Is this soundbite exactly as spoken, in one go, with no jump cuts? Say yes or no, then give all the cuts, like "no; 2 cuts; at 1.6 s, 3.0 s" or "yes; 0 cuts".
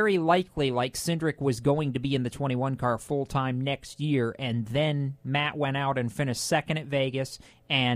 yes; 0 cuts